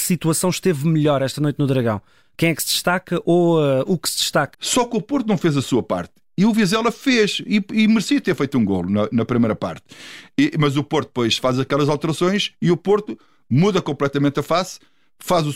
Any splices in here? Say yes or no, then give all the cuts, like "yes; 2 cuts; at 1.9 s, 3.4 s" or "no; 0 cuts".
yes; 1 cut; at 4.5 s